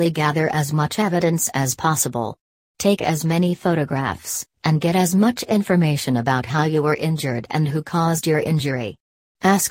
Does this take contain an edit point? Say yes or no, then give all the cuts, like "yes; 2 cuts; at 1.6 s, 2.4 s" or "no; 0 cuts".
yes; 1 cut; at 4.6 s